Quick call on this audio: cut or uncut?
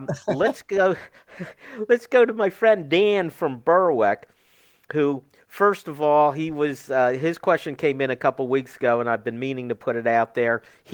uncut